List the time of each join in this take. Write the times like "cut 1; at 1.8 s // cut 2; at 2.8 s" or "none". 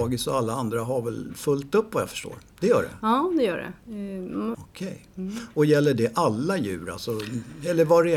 cut 1; at 2.5 s // cut 2; at 4.5 s